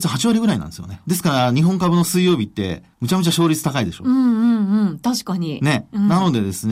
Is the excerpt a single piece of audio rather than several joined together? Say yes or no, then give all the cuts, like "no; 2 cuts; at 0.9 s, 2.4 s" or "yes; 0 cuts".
no; 2 cuts; at 1.0 s, 2.9 s